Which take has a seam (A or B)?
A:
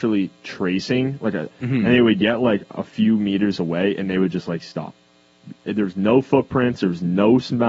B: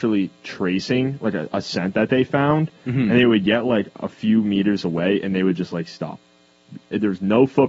A